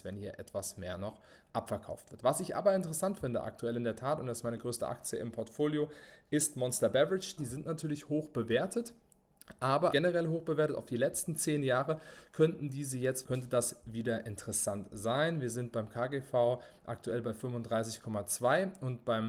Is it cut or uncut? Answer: cut